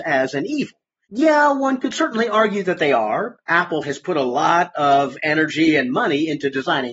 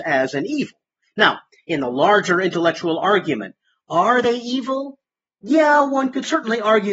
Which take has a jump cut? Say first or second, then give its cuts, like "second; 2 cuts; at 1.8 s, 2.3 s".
first; 2 cuts; at 1.0 s, 3.8 s